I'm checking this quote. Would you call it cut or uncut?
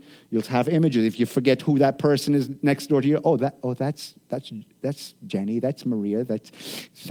uncut